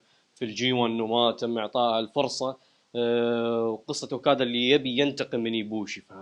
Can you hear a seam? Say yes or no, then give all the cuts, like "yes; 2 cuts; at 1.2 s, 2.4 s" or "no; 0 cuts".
no; 0 cuts